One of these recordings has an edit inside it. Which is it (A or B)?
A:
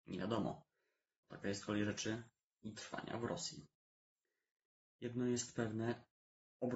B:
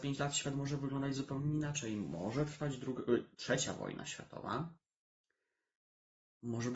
A